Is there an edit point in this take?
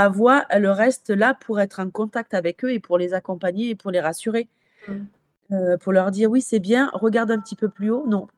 no; 0 cuts

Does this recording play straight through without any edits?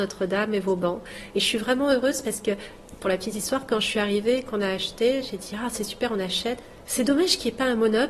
yes; 0 cuts

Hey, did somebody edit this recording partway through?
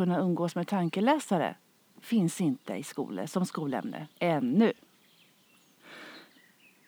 yes; 1 cut; at 4.1 s

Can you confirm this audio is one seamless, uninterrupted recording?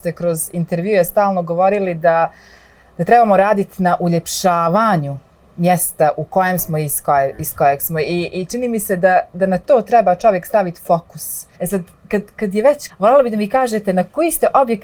no; 2 cuts; at 11.5 s, 12.9 s

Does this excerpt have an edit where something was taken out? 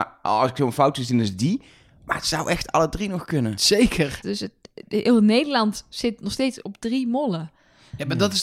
yes; 1 cut; at 4.2 s

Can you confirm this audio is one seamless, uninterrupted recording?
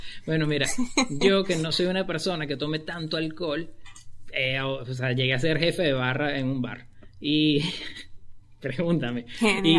yes; 0 cuts

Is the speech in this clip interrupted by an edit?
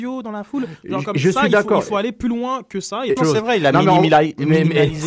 yes; 1 cut; at 3.2 s

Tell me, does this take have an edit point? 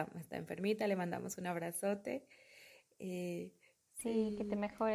no; 0 cuts

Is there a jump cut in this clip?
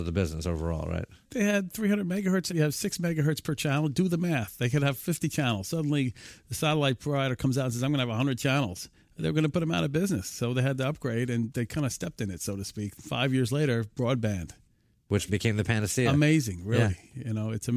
no; 0 cuts

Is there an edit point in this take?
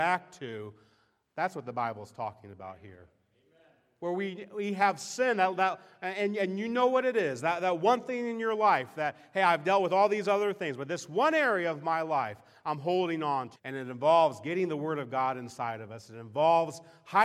yes; 1 cut; at 13.6 s

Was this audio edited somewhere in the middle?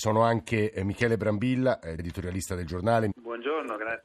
yes; 2 cuts; at 2.0 s, 3.1 s

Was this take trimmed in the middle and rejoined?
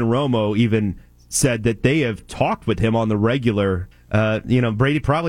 yes; 1 cut; at 3.9 s

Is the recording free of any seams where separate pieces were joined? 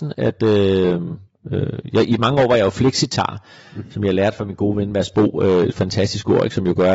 yes; 0 cuts

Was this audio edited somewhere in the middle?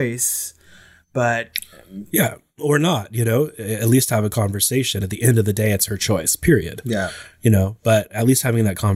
no; 0 cuts

